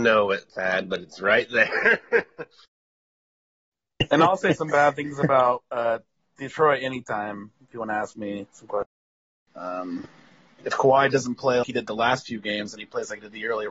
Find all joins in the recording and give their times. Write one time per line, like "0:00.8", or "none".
0:09.5
0:11.6